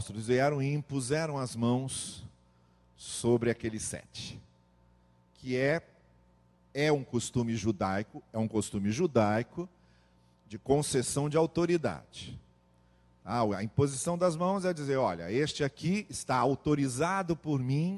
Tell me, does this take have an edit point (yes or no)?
no